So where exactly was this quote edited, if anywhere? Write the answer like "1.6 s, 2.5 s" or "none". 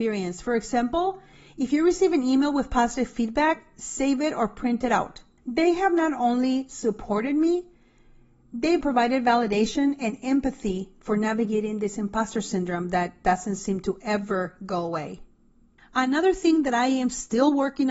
5.4 s, 8.8 s, 15.8 s